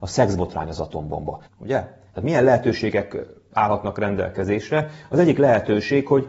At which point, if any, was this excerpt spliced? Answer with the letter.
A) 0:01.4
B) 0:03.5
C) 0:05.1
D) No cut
A